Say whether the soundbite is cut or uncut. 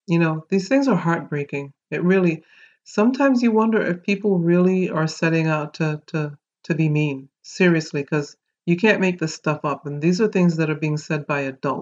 uncut